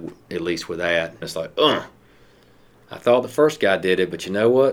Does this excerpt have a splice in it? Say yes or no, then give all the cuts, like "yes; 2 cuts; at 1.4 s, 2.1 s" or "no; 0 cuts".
yes; 1 cut; at 1.2 s